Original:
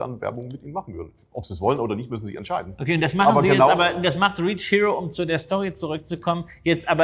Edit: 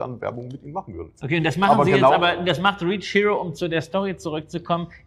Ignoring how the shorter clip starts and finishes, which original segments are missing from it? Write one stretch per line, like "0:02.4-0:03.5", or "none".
0:01.2-0:02.8